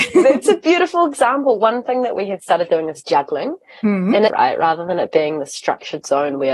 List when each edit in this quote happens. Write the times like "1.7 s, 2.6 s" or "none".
4.3 s

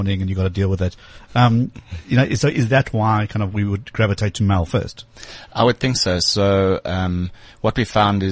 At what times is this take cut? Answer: none

